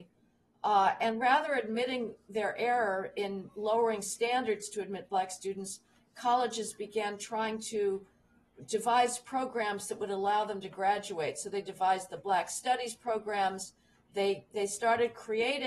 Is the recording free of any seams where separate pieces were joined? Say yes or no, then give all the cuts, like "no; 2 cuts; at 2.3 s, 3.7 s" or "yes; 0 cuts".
yes; 0 cuts